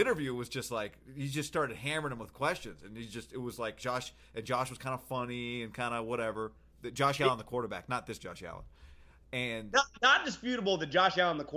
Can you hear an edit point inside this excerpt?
no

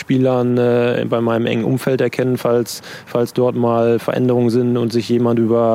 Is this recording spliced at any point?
no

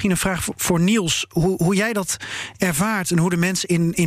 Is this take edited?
no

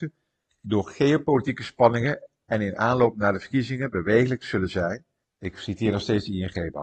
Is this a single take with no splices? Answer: no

